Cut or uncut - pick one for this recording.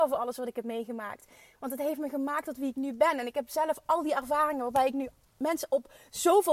uncut